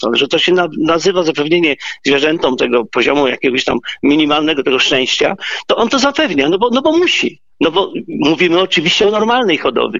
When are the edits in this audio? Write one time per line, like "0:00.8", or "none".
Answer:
0:07.5